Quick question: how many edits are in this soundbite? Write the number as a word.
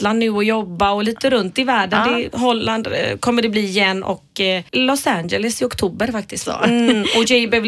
two